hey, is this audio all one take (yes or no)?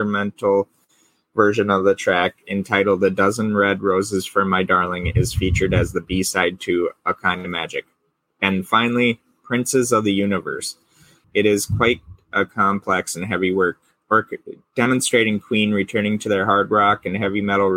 no